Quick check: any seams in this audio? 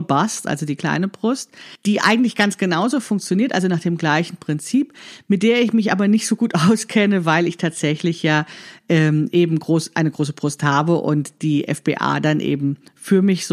no; 0 cuts

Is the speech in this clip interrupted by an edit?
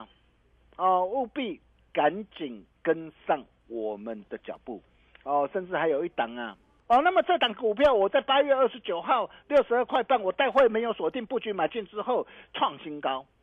yes; 2 cuts; at 6.8 s, 12.5 s

